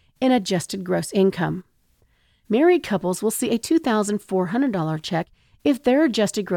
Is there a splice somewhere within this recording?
no; 0 cuts

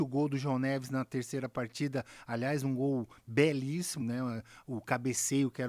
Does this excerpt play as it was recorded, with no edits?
no; 1 cut; at 4.0 s

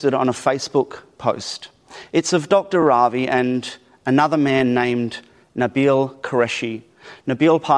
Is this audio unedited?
yes; 0 cuts

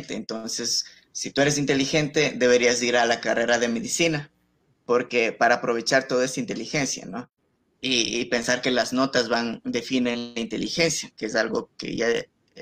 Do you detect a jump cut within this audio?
yes; 1 cut; at 7.7 s

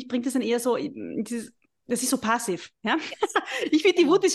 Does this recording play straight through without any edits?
yes; 0 cuts

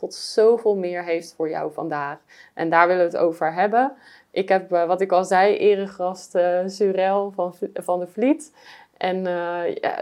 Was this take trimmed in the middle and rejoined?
no; 0 cuts

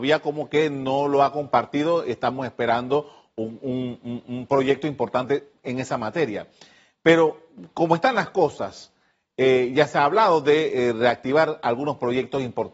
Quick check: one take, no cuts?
yes; 0 cuts

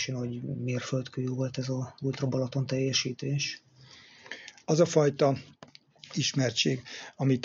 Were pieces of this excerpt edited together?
yes; 1 cut; at 4.6 s

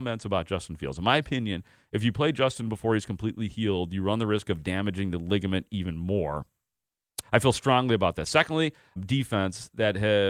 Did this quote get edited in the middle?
yes; 2 cuts; at 7.2 s, 9.0 s

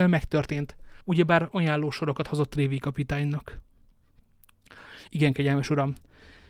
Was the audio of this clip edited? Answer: yes; 2 cuts; at 1.0 s, 5.1 s

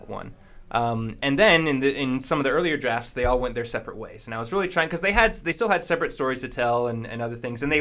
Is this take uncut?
yes; 0 cuts

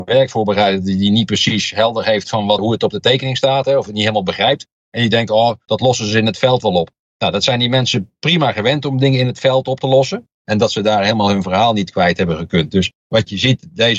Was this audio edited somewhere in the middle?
yes; 2 cuts; at 2.6 s, 10.3 s

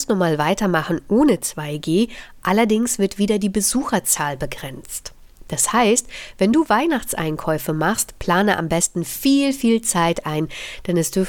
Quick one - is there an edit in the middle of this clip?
no; 0 cuts

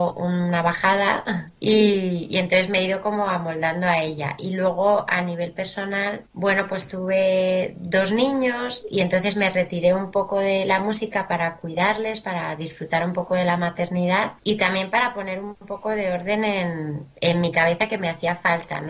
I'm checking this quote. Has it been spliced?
no; 0 cuts

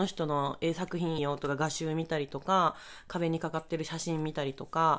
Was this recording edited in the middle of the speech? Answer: yes; 1 cut; at 1.2 s

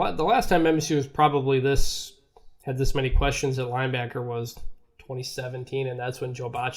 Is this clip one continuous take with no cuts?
yes; 0 cuts

